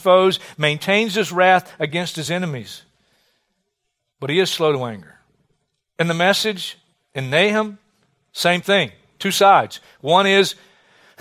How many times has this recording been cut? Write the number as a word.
one